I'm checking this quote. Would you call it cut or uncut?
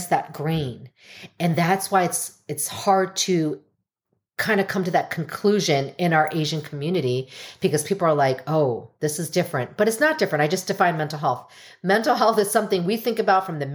uncut